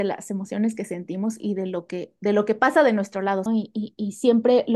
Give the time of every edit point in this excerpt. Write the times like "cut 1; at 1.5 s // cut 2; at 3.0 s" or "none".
cut 1; at 3.5 s